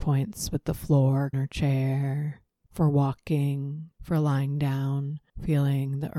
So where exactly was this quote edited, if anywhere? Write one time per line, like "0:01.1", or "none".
0:01.3
0:02.6
0:03.9